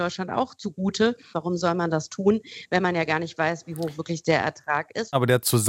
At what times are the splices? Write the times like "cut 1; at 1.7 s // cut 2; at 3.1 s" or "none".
cut 1; at 1.3 s